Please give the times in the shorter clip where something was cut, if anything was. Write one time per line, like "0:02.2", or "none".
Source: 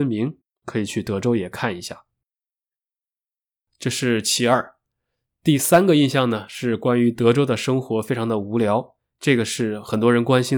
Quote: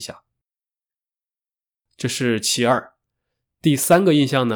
none